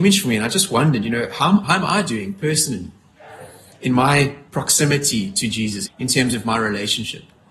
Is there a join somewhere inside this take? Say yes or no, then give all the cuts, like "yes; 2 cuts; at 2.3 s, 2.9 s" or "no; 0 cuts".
yes; 2 cuts; at 1.6 s, 5.9 s